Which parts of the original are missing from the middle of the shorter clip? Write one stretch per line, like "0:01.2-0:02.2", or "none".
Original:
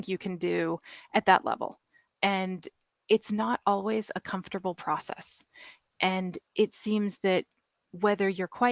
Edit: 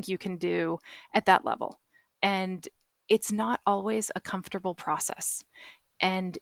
none